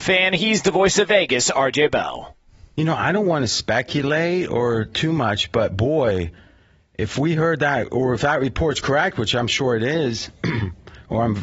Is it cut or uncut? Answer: uncut